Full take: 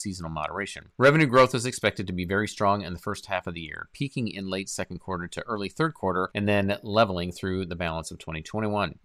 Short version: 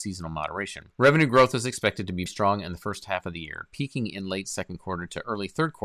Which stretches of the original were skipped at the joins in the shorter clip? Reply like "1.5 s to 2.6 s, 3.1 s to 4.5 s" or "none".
2.3 s to 2.5 s

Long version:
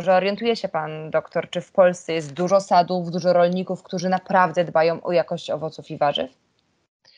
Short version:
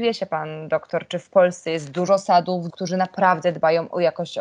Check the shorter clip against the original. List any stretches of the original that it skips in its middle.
3.1 s to 3.8 s

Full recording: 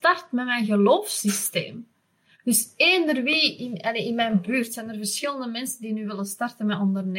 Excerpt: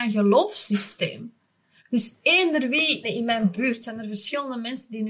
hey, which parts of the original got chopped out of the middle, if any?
3.6 s to 3.9 s

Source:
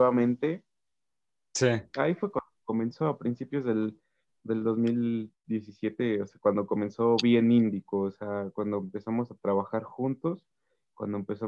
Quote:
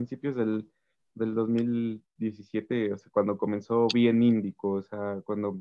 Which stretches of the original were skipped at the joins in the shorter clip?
none

